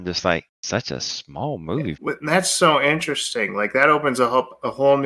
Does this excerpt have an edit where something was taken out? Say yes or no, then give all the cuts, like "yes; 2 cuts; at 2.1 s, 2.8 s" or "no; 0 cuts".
yes; 1 cut; at 2.0 s